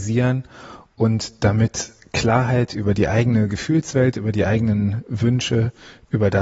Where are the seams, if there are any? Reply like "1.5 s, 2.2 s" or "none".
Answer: none